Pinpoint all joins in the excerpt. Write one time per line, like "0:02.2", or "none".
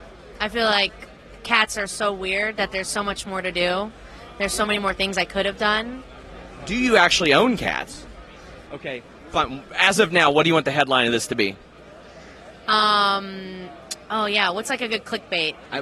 0:08.6